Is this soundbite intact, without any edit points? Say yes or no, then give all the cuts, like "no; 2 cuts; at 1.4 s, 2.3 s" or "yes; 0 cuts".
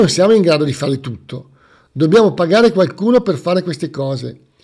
yes; 0 cuts